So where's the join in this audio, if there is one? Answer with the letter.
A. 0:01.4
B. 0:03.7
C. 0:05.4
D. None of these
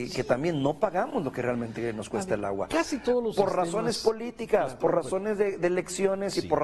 D